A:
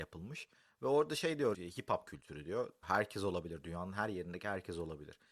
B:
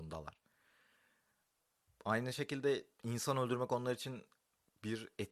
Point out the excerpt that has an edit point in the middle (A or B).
A